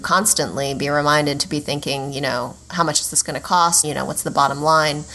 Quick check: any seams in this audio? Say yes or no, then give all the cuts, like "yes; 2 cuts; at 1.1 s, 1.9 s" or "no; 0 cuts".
yes; 1 cut; at 3.8 s